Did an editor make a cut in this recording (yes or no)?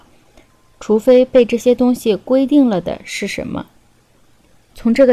no